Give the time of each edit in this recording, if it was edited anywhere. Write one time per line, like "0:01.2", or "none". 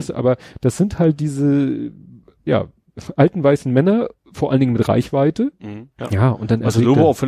0:05.9